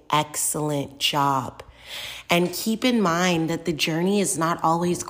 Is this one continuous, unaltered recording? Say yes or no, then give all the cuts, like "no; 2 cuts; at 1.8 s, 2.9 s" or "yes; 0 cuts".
yes; 0 cuts